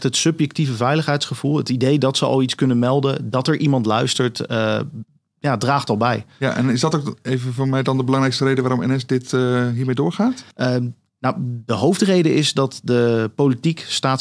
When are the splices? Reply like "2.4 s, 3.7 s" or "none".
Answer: 10.5 s

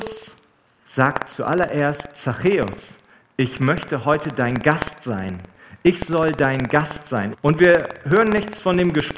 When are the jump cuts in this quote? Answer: 7.3 s

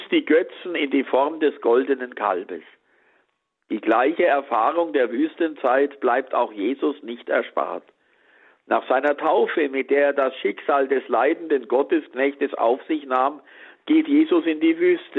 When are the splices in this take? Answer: none

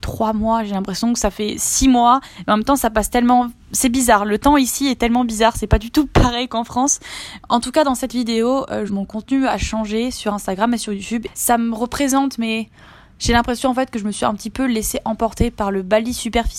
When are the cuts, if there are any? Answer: 7.4 s, 8.9 s, 11.3 s

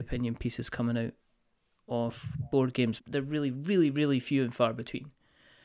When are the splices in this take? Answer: 3.0 s

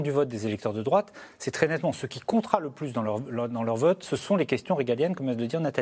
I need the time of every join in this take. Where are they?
none

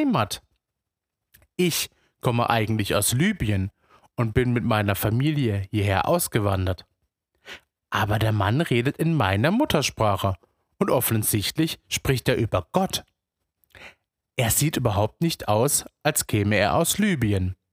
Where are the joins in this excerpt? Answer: none

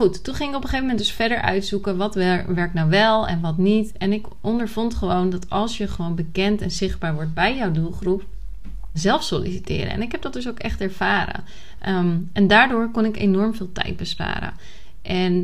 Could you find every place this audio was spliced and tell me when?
8.9 s

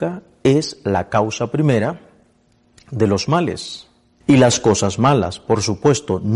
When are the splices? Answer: 4.2 s

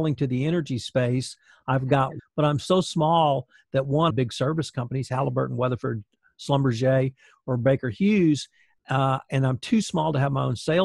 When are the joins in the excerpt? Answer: 2.2 s, 4.1 s

